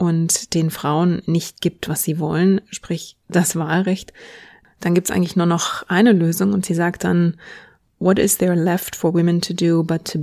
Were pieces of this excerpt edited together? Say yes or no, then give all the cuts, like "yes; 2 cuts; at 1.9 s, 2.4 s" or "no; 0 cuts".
no; 0 cuts